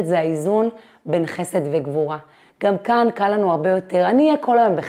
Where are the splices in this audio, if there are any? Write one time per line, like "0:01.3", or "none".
0:02.4